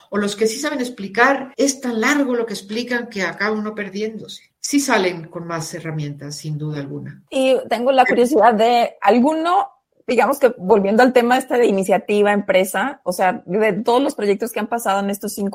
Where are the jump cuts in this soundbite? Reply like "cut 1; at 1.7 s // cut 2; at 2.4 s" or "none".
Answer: cut 1; at 4.5 s